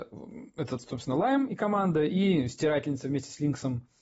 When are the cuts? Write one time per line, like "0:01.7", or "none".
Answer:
none